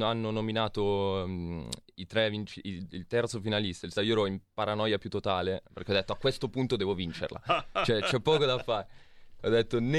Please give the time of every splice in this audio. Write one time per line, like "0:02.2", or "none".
0:03.9